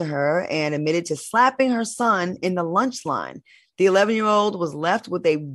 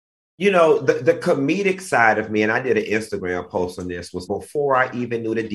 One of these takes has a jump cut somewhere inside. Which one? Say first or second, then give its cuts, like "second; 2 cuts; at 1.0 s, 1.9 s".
second; 1 cut; at 4.3 s